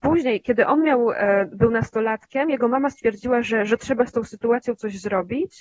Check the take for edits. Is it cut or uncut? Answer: uncut